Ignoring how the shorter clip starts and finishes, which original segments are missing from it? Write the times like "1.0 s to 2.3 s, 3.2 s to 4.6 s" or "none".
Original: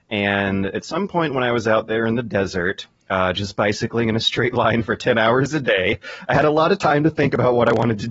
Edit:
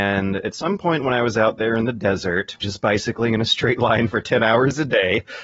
2.9 s to 3.4 s